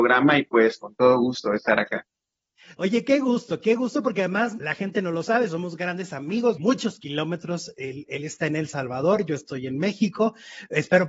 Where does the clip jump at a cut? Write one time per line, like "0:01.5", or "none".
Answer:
0:04.6
0:06.6